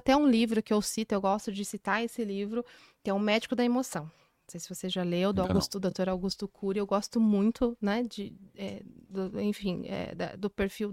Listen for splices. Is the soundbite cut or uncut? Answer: uncut